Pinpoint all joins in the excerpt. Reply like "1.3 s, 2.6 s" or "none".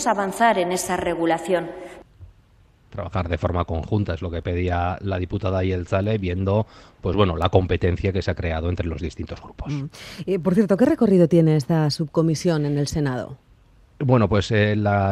none